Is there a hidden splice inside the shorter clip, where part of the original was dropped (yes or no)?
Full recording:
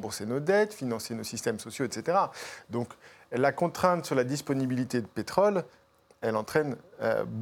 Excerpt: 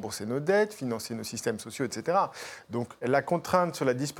yes